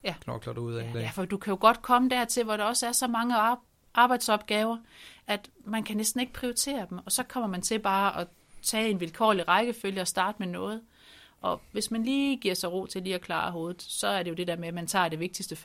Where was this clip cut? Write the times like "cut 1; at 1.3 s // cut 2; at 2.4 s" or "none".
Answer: cut 1; at 0.9 s